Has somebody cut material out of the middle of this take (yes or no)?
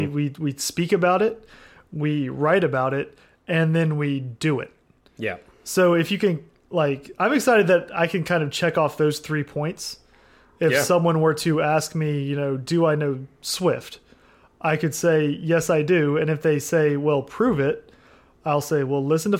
no